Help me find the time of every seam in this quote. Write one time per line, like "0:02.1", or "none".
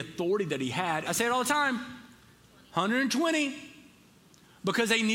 0:01.0